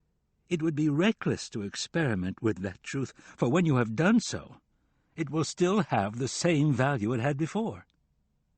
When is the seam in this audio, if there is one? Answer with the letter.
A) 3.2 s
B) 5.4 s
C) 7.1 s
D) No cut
D